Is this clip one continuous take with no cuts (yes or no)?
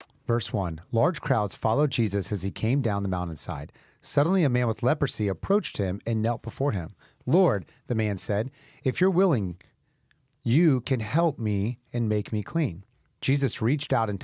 yes